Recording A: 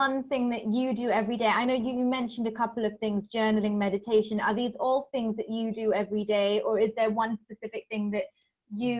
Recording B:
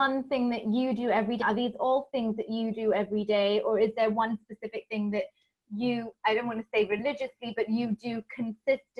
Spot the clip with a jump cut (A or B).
B